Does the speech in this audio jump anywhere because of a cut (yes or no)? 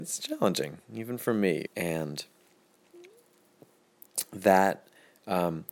yes